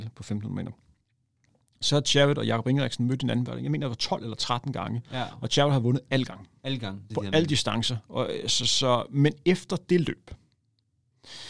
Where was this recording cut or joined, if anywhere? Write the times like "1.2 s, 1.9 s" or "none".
7.1 s, 8.6 s